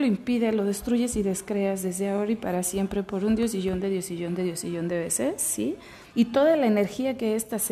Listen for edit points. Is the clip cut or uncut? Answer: cut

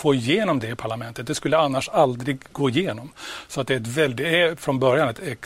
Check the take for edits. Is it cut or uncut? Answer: uncut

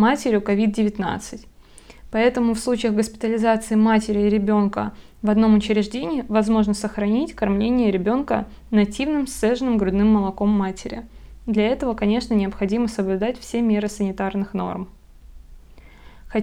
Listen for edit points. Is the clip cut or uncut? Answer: uncut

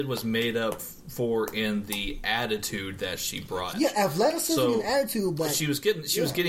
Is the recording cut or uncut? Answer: cut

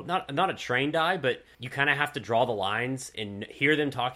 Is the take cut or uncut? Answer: cut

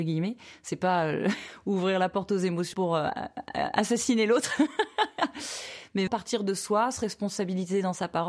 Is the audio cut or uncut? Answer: cut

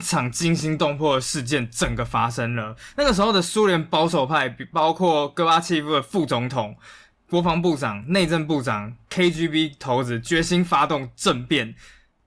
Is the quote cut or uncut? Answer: uncut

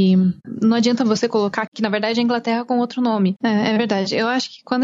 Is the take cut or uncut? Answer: cut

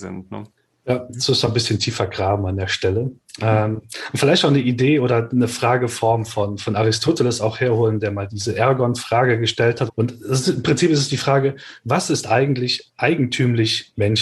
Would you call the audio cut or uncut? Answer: cut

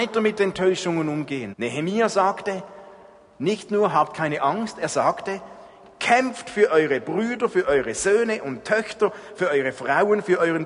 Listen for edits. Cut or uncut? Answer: cut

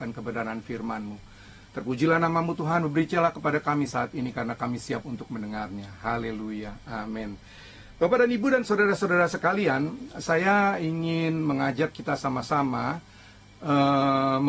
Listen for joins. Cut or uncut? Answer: uncut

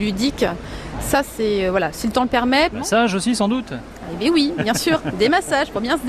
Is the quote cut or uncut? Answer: cut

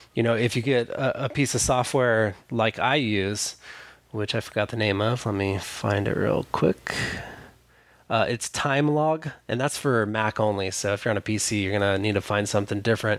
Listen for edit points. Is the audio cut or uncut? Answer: uncut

